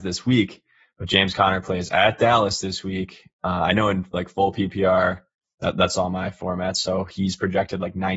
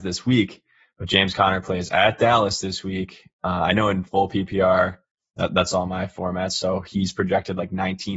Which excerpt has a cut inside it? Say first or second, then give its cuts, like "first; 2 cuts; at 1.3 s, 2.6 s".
second; 1 cut; at 4.1 s